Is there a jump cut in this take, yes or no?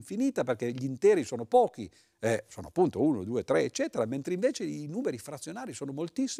no